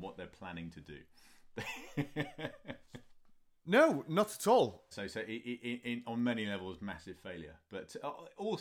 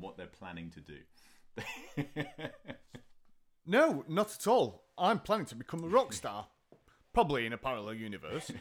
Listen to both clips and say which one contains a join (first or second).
first